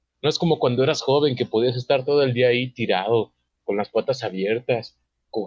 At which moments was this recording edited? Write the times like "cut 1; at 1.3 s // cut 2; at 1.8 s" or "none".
none